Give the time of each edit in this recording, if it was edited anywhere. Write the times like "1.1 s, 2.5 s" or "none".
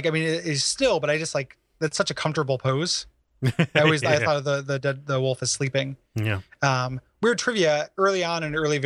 none

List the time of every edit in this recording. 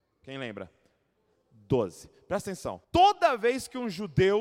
2.8 s

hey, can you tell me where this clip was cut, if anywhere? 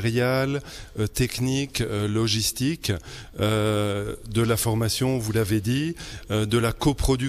none

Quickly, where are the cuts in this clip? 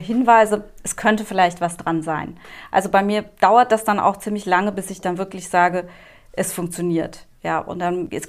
none

